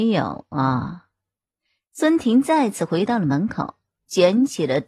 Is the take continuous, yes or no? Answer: yes